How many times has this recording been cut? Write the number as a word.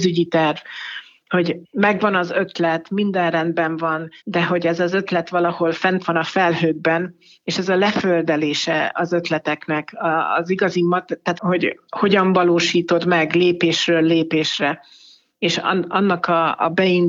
two